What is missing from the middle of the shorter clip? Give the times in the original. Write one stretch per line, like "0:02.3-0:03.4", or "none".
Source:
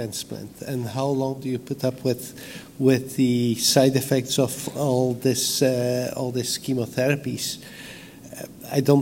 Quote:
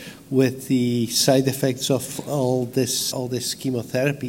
0:05.6-0:06.1